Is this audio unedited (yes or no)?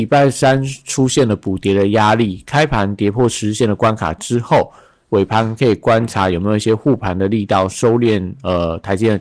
yes